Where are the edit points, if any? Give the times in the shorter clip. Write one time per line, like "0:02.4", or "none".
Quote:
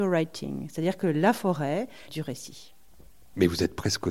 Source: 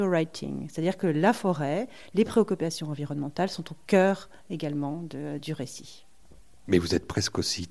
0:02.1